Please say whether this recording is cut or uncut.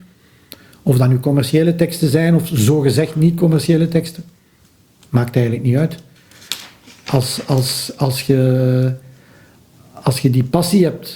uncut